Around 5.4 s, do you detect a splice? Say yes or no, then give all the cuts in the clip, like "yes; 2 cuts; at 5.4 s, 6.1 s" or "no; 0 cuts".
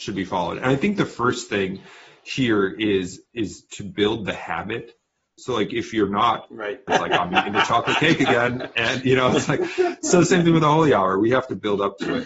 yes; 2 cuts; at 5.4 s, 6.9 s